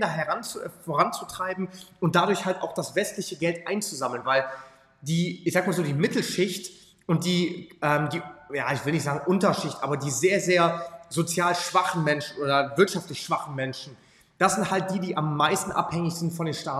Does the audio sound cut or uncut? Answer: uncut